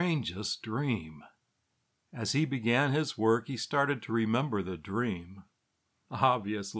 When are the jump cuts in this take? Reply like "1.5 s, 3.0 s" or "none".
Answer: none